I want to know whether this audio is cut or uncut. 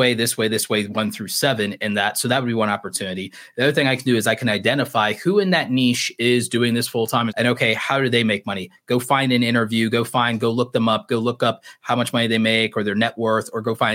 cut